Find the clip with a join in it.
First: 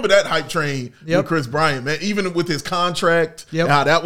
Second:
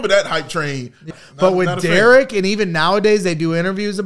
second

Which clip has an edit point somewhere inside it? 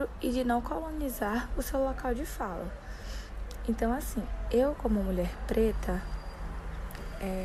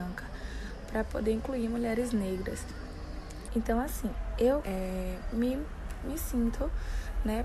second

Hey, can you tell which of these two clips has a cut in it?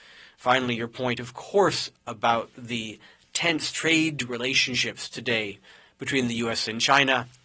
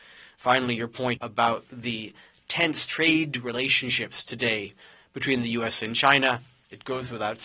second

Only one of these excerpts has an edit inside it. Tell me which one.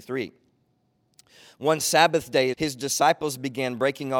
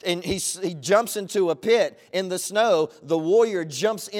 first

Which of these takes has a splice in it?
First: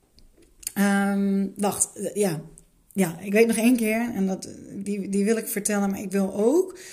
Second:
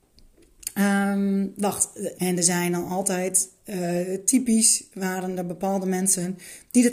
second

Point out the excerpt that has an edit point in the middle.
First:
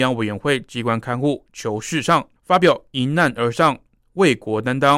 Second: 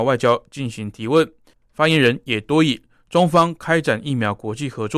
first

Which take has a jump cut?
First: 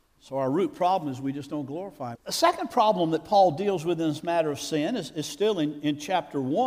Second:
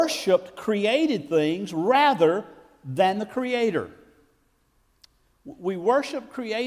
first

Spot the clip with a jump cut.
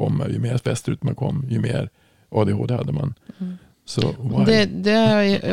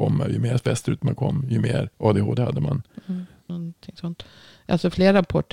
second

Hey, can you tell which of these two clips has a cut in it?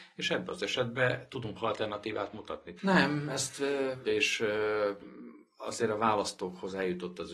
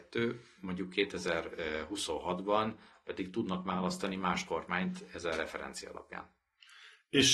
first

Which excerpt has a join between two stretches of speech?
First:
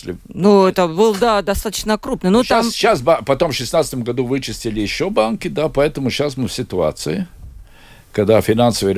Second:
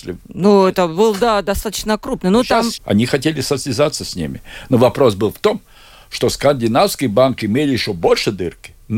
second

